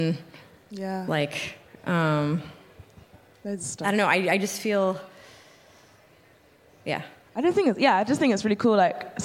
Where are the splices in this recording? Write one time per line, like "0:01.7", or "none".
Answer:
none

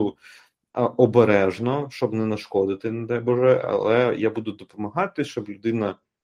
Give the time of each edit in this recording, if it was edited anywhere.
none

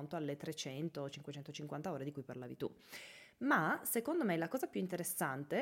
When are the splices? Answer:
0:01.1

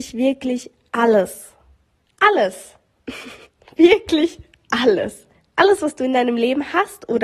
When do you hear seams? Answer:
none

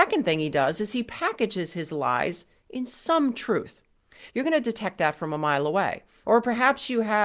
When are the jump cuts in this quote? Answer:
0:04.3
0:06.2

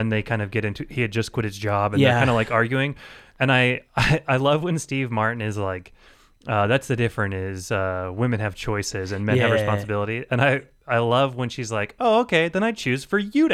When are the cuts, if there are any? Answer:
none

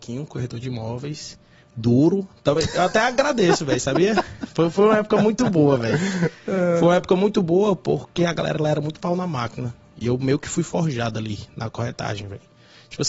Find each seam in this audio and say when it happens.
none

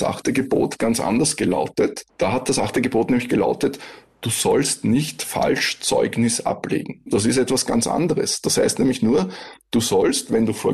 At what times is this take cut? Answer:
none

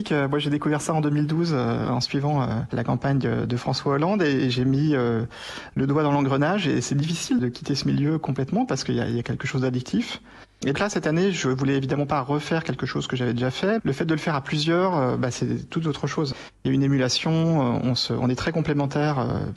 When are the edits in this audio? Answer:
0:10.7
0:13.8

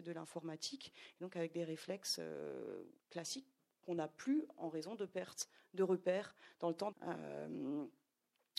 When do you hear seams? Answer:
0:03.0
0:06.9

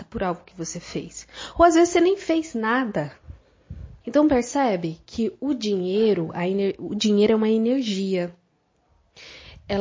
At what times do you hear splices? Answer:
0:04.0

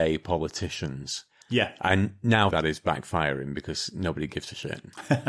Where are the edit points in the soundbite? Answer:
0:01.4
0:02.5

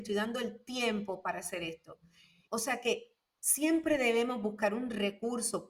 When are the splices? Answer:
0:02.5

